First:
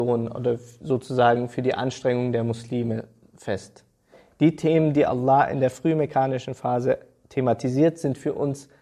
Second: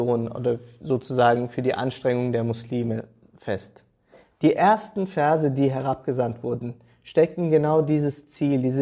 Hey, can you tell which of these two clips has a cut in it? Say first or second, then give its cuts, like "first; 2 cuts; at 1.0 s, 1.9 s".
second; 1 cut; at 4.2 s